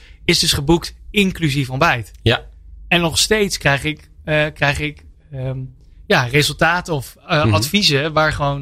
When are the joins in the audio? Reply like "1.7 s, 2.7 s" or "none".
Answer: none

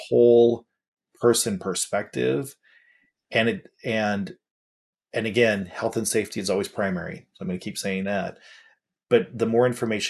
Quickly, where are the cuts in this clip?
none

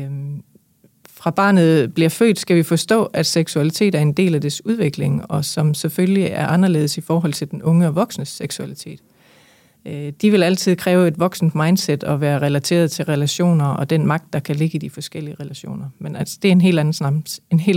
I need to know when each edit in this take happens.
none

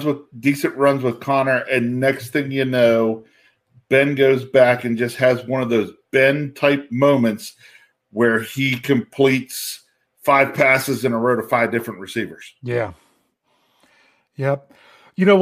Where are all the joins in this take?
none

